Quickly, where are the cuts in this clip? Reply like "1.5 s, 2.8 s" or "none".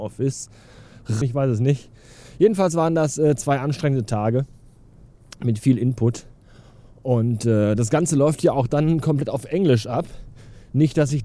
1.2 s